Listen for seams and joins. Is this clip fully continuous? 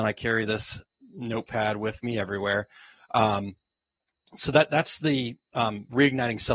yes; 0 cuts

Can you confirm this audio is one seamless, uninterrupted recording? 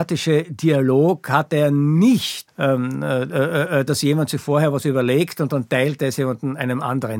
no; 2 cuts; at 2.5 s, 3.9 s

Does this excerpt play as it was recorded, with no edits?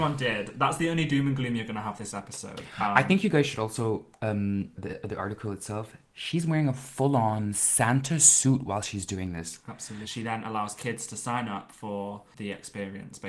no; 2 cuts; at 4.8 s, 10.0 s

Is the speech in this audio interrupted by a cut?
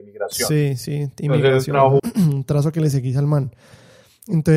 yes; 1 cut; at 2.0 s

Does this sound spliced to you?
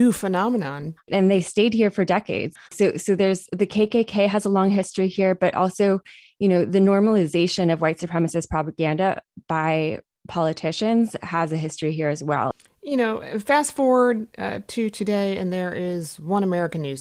yes; 2 cuts; at 1.0 s, 2.7 s

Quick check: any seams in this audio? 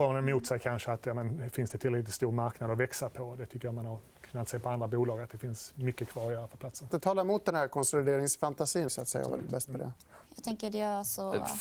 yes; 3 cuts; at 6.9 s, 8.9 s, 10.3 s

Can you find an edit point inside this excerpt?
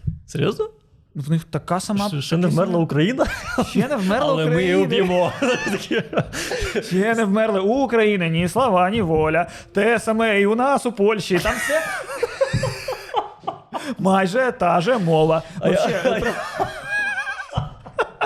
no; 0 cuts

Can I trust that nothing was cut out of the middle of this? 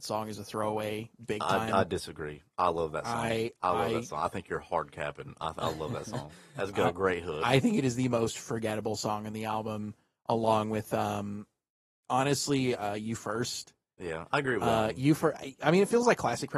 yes; 0 cuts

